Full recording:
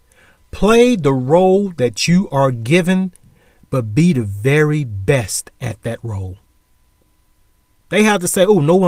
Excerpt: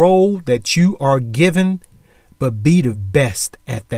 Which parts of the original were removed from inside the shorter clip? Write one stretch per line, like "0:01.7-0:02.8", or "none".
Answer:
0:04.2-0:04.9